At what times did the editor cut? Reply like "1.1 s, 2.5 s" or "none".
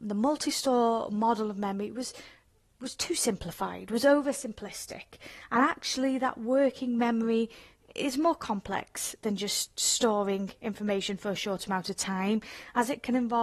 none